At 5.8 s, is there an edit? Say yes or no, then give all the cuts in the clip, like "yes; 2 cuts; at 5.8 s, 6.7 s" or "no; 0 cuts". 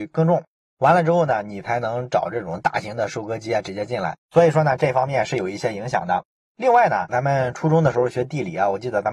no; 2 cuts; at 4.3 s, 7.1 s